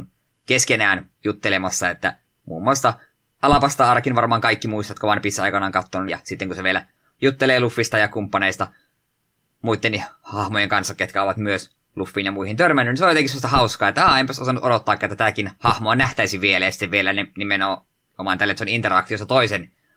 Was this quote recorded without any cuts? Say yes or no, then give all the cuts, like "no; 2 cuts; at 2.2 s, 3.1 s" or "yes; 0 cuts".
no; 1 cut; at 6.1 s